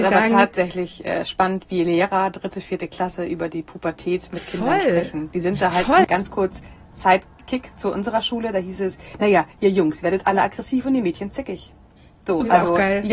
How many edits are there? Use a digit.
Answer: 1